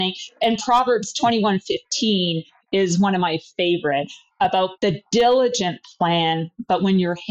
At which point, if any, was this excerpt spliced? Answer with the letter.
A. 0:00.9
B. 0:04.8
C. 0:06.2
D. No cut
B